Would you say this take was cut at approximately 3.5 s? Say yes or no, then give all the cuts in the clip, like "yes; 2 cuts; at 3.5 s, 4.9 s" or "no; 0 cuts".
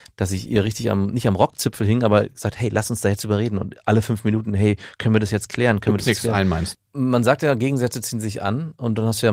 no; 1 cut; at 6.7 s